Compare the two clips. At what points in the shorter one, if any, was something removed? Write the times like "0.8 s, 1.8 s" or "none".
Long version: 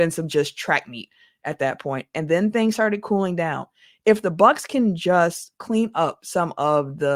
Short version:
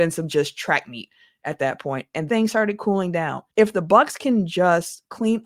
2.3 s, 3.5 s